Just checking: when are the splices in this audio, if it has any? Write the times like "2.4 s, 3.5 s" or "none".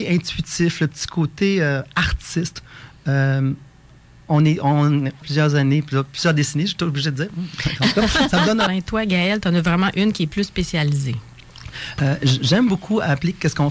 5.2 s, 8.7 s

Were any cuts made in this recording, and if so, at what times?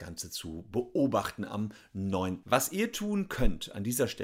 2.4 s

